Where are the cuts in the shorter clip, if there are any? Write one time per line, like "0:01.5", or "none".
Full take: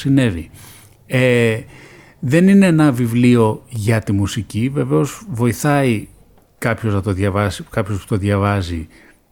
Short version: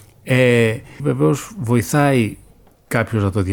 0:01.0